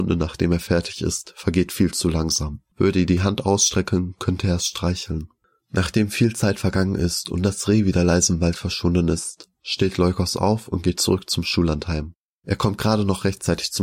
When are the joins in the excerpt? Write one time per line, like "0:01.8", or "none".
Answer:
0:02.7